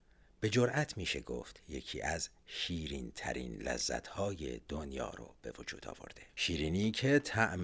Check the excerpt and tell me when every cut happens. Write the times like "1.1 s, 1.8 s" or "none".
6.3 s